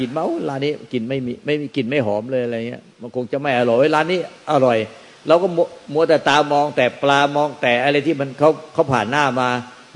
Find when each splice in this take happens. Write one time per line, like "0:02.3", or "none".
none